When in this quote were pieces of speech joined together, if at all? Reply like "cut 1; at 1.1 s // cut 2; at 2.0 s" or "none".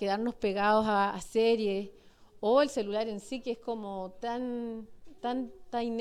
cut 1; at 1.1 s